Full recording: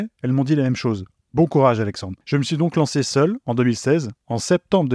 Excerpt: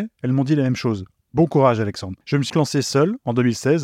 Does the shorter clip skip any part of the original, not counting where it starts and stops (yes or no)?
yes